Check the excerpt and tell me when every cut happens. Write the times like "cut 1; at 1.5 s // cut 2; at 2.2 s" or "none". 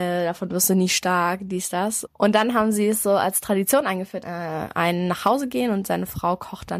cut 1; at 2.1 s // cut 2; at 4.2 s